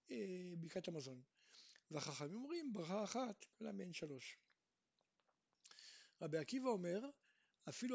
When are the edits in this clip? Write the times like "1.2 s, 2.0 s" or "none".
3.5 s